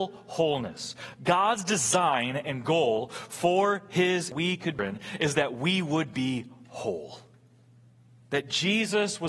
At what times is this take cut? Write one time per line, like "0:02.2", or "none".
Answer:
none